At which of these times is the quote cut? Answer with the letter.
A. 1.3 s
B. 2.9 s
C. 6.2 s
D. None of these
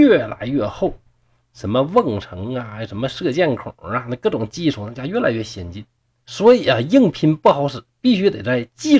C